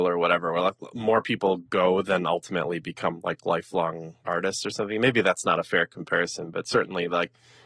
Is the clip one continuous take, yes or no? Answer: yes